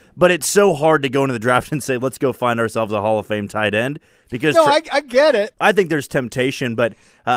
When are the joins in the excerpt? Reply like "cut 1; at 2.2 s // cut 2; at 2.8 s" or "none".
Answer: cut 1; at 5.5 s